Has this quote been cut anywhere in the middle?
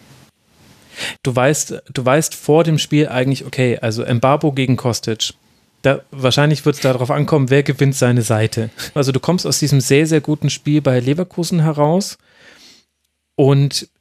yes; 2 cuts; at 1.2 s, 9.0 s

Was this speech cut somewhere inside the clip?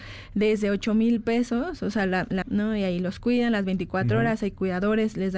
yes; 1 cut; at 2.4 s

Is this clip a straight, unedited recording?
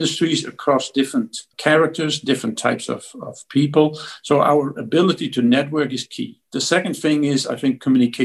yes; 0 cuts

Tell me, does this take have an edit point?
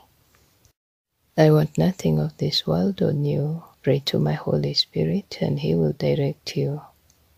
yes; 1 cut; at 3.7 s

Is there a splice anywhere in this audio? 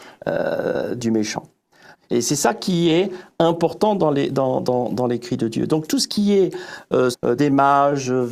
yes; 2 cuts; at 1.9 s, 7.1 s

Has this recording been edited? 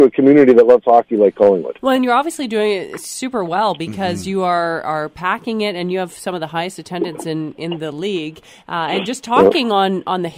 no; 0 cuts

